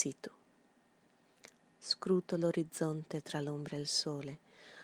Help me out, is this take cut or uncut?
cut